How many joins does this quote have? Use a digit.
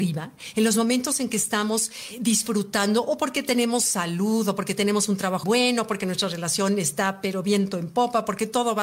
1